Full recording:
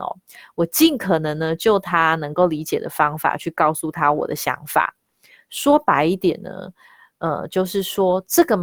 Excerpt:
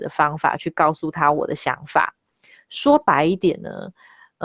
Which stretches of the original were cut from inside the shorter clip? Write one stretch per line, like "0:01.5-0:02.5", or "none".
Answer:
none